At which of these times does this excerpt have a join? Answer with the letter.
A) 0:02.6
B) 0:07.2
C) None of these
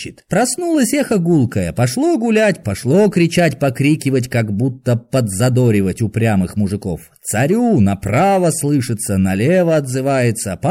A